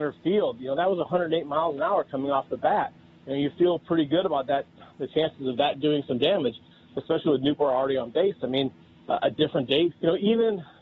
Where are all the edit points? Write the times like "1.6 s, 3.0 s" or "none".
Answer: 9.9 s